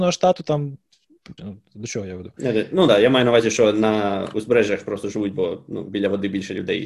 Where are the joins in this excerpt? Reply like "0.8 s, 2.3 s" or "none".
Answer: 1.4 s